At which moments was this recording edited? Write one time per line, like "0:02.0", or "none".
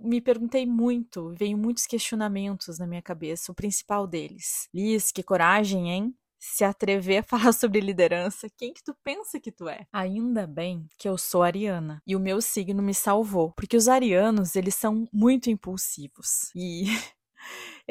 none